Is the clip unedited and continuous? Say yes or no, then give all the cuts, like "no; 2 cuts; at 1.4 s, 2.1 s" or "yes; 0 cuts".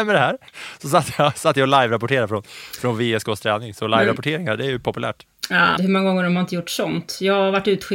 no; 1 cut; at 5.8 s